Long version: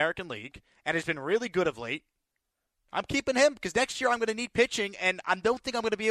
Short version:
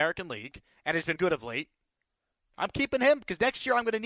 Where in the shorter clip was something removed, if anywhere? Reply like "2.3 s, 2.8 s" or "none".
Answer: 1.2 s